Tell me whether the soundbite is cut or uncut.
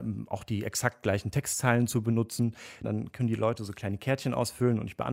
cut